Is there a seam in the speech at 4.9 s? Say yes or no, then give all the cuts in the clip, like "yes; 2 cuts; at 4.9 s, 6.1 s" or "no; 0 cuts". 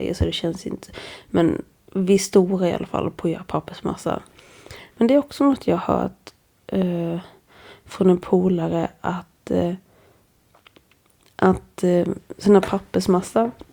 yes; 1 cut; at 4.9 s